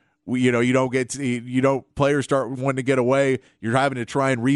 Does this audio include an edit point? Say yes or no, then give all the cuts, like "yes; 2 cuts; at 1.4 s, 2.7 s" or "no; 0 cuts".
no; 0 cuts